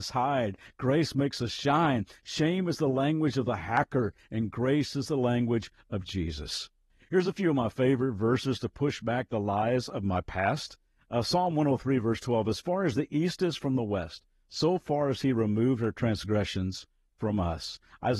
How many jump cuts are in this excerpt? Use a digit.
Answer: 0